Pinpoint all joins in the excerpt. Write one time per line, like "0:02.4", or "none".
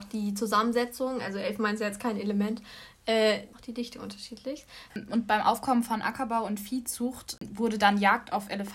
0:03.5
0:04.9